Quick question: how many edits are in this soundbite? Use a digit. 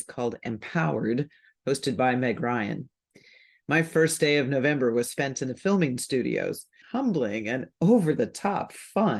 1